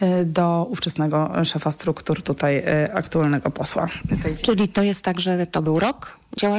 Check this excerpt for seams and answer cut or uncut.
uncut